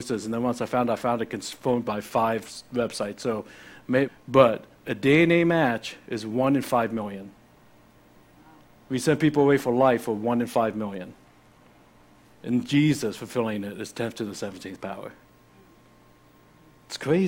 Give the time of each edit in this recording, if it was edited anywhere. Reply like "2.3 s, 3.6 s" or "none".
4.1 s